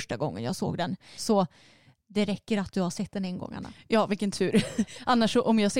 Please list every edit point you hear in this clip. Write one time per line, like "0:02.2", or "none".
0:01.2